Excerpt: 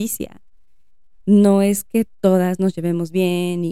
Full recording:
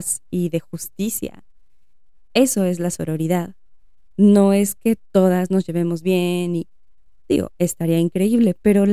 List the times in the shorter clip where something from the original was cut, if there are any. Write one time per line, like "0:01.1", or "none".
0:01.2

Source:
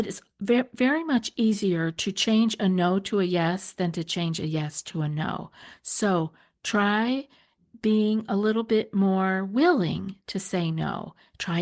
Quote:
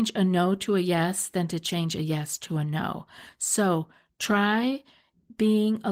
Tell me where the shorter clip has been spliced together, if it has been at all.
none

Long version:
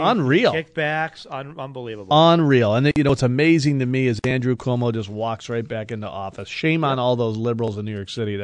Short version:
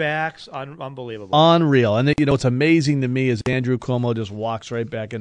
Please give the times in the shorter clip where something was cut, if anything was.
none

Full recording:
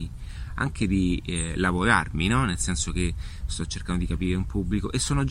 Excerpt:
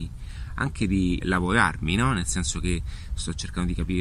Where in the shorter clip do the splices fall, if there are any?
0:01.2

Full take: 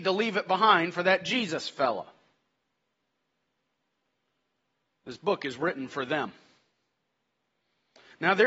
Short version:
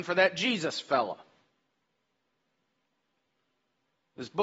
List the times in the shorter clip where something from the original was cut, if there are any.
none

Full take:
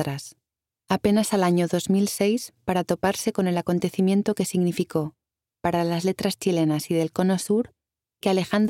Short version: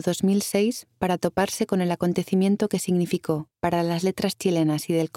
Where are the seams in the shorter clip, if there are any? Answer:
0:03.5

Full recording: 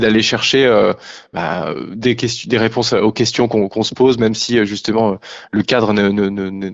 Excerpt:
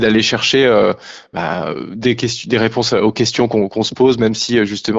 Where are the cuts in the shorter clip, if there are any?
none

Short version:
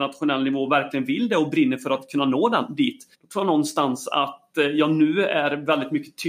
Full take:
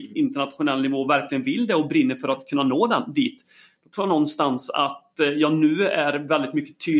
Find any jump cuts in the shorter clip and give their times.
0:03.1

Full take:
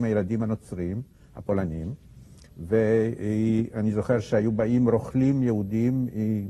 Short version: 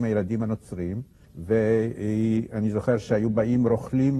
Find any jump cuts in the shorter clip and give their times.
0:01.2

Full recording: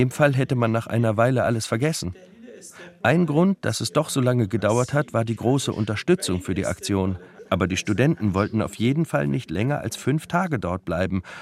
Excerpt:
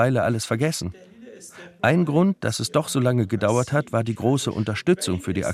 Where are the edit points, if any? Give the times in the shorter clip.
none

